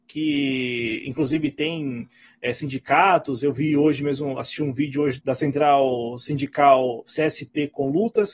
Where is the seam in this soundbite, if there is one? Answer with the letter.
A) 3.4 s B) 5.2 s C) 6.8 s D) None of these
B